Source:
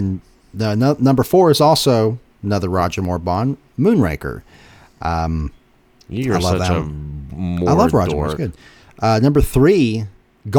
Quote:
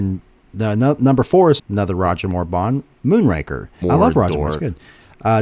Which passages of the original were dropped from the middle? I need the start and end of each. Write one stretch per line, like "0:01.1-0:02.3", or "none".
0:01.6-0:02.3
0:04.6-0:07.6